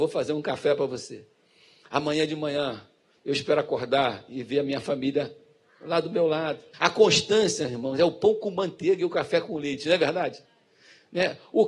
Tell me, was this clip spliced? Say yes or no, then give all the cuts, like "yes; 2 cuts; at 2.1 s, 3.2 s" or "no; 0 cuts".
yes; 1 cut; at 6.7 s